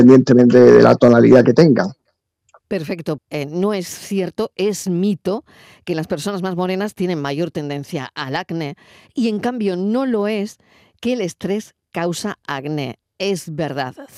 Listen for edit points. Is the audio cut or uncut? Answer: cut